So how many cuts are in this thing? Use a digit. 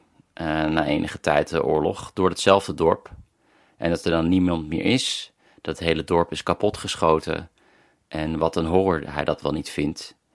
0